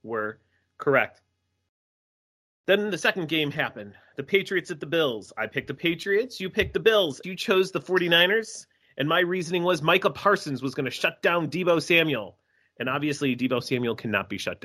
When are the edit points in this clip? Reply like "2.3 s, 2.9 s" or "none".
7.2 s